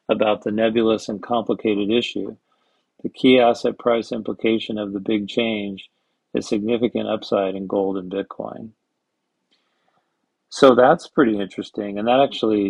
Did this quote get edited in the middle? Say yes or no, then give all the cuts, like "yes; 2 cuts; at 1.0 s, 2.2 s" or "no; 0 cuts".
no; 0 cuts